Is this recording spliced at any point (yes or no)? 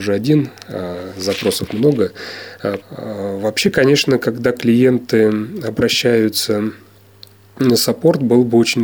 yes